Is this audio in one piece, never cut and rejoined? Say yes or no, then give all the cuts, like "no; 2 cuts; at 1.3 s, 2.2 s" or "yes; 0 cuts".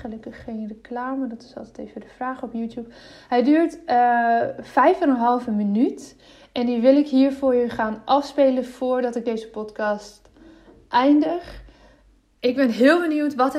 no; 1 cut; at 12.4 s